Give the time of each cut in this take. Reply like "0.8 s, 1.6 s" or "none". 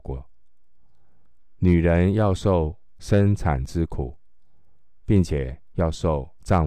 1.6 s